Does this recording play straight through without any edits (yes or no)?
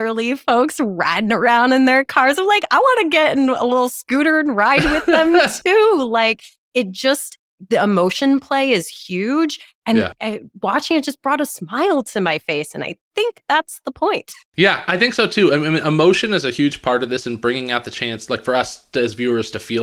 yes